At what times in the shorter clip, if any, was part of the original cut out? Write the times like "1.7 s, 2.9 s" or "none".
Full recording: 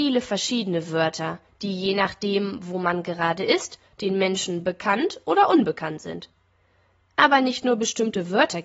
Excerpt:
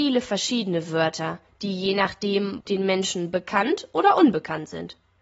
2.6 s